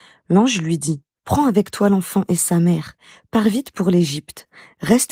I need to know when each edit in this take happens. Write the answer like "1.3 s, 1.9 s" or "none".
1.2 s

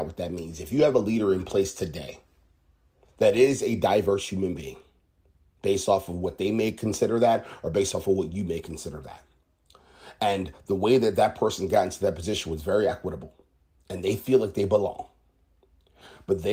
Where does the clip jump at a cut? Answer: 3.0 s

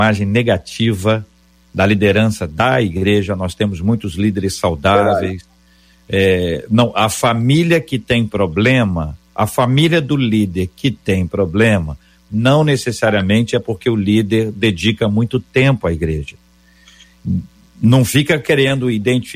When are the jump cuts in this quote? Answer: none

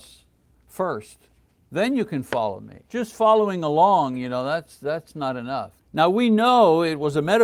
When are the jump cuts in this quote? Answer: 2.8 s, 5.8 s

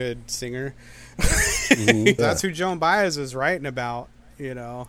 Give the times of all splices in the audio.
2.2 s

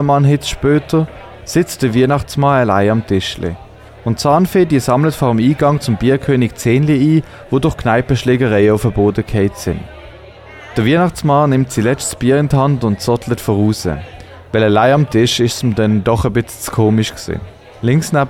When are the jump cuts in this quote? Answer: 3.9 s

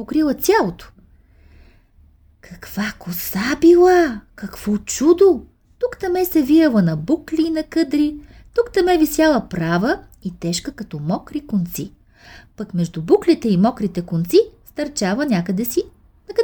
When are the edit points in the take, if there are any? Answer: none

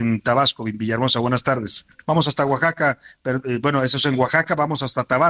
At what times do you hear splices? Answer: 2.0 s

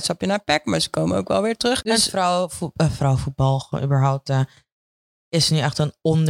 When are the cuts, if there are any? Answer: none

